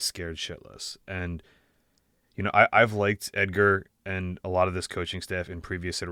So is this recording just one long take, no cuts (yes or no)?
yes